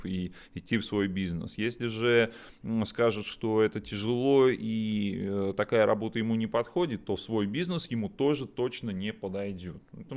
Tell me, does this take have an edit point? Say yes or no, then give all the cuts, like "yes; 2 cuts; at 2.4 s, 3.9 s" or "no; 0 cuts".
no; 0 cuts